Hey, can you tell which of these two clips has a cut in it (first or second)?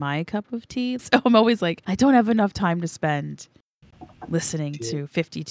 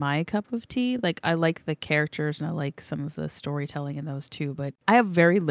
first